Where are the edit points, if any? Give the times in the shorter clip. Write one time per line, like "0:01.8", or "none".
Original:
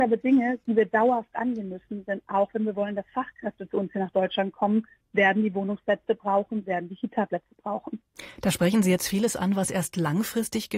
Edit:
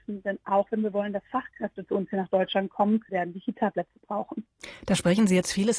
0:03.1